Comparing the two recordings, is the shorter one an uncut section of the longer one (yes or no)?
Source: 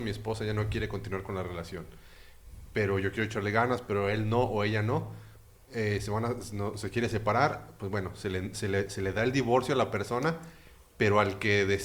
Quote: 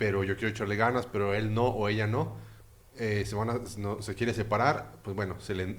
yes